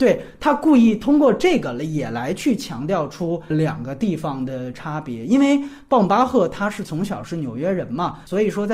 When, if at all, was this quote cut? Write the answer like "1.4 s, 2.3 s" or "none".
none